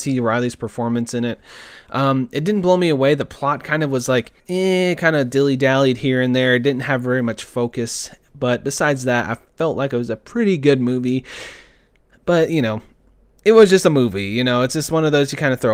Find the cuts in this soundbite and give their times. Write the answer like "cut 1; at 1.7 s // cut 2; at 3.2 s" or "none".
cut 1; at 4.4 s